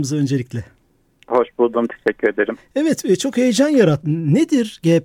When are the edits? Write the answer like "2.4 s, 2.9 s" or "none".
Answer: 4.0 s